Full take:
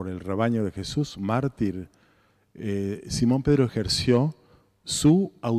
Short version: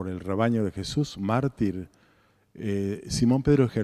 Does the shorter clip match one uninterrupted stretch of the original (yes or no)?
yes